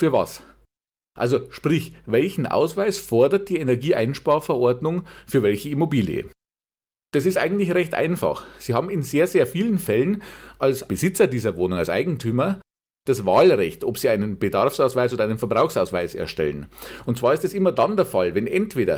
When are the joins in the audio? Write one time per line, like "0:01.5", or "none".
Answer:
none